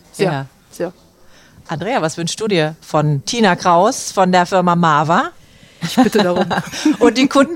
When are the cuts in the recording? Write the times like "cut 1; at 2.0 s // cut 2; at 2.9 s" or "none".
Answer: cut 1; at 5.8 s